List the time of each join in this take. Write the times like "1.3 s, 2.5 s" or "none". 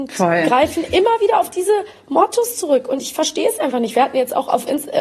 none